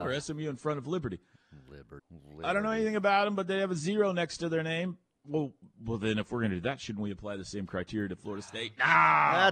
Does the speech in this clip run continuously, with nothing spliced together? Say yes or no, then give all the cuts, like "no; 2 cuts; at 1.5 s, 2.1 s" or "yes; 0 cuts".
no; 1 cut; at 2.0 s